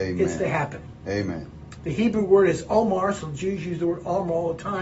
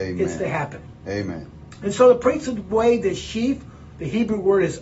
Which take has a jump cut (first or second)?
first